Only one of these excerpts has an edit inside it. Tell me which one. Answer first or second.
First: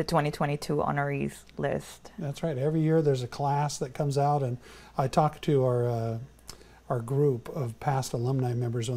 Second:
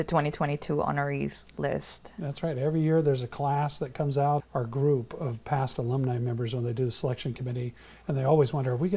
second